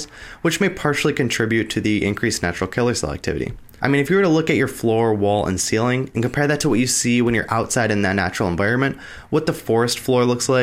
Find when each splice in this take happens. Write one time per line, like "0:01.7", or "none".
0:03.8